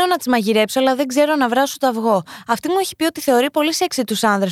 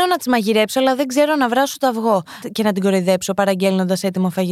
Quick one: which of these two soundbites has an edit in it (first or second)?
second